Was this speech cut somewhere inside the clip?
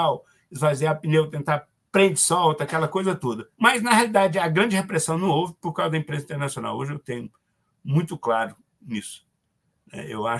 yes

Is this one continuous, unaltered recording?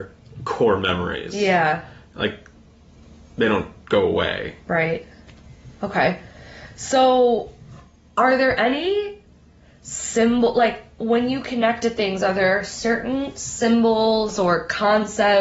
yes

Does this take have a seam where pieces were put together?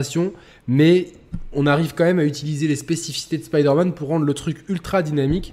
no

